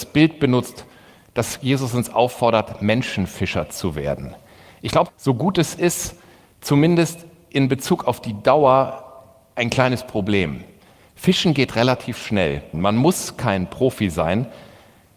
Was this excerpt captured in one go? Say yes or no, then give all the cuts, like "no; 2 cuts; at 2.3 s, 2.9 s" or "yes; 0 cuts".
no; 2 cuts; at 5.1 s, 12.7 s